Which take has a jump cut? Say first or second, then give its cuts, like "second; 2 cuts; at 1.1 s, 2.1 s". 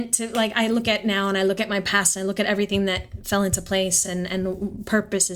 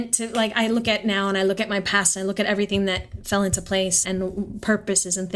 second; 1 cut; at 4.0 s